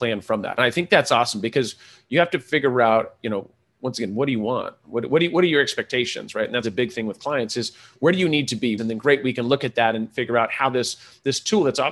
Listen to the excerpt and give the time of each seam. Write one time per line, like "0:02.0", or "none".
0:06.6
0:08.8

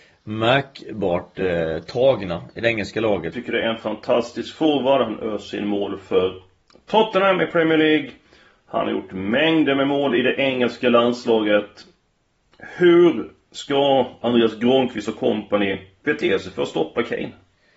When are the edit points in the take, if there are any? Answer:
0:03.3

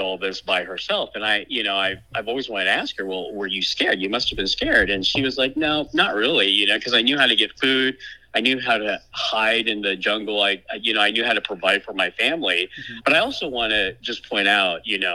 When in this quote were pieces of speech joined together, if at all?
0:13.0

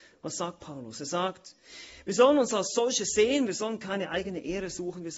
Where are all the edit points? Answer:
0:03.5

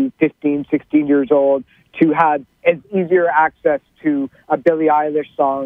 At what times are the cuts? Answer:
0:02.5

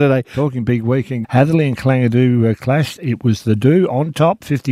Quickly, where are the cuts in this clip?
0:01.2

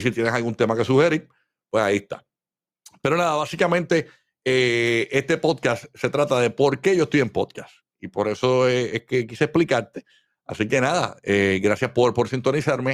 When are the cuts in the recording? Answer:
none

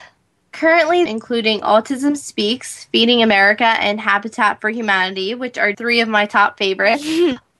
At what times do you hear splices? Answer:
0:01.1
0:05.7

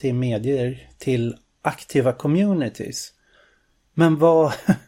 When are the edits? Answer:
none

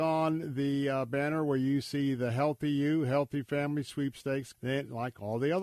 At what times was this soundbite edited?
0:04.5

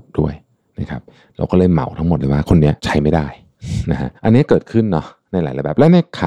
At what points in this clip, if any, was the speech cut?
0:02.8
0:04.2

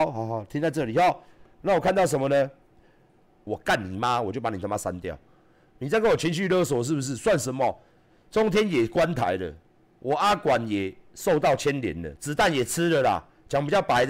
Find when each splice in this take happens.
0:03.5

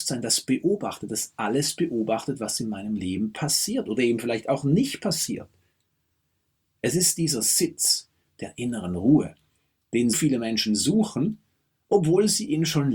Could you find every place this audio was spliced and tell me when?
0:10.1

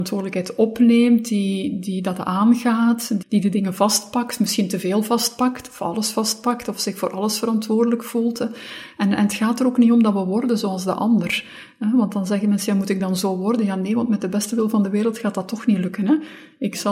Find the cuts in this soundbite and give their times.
0:03.2

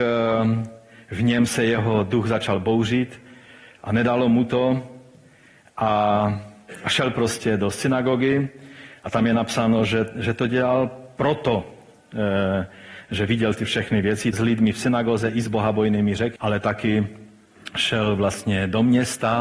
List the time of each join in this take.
0:14.3
0:16.4

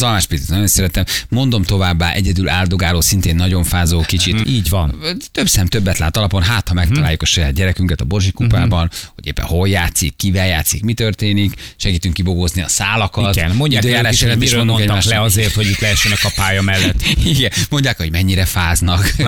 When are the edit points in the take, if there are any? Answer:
0:04.4

